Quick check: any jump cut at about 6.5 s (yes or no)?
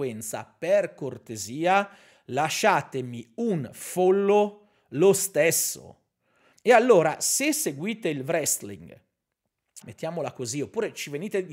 yes